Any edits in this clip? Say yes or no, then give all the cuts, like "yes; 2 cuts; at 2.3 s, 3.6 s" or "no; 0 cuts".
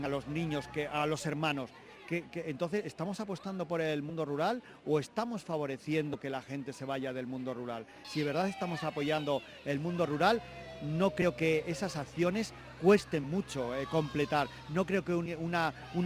yes; 1 cut; at 8.0 s